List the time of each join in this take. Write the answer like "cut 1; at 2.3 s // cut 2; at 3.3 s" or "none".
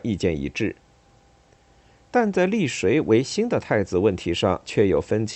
none

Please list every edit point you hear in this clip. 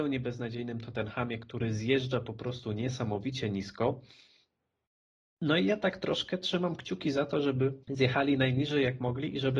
cut 1; at 7.8 s

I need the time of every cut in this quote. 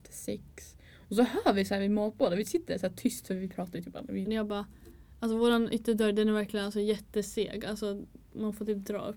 cut 1; at 4.3 s

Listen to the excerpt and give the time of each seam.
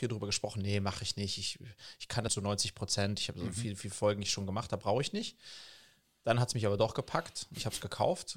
cut 1; at 2.3 s

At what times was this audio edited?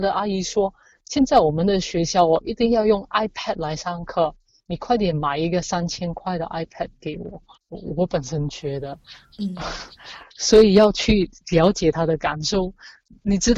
cut 1; at 7.5 s

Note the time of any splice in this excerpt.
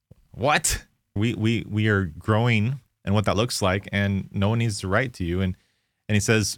cut 1; at 1.2 s

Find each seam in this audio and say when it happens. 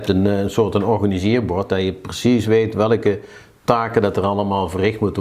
none

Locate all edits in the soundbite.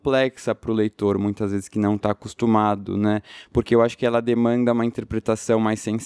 none

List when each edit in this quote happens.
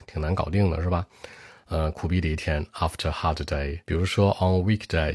cut 1; at 3.9 s

